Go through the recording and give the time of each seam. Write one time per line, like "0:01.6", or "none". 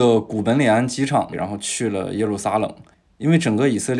0:01.3